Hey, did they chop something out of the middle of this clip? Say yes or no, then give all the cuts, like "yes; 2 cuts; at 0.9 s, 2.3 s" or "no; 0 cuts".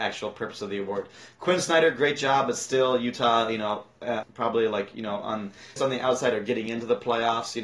yes; 2 cuts; at 4.2 s, 5.8 s